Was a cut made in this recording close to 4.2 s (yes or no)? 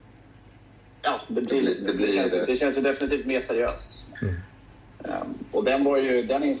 yes